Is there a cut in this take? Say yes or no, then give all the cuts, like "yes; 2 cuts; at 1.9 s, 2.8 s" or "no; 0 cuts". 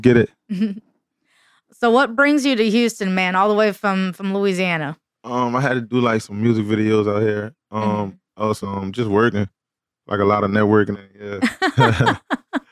yes; 2 cuts; at 8.6 s, 10.9 s